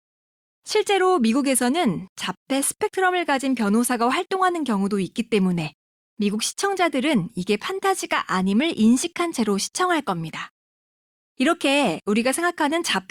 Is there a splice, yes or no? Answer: no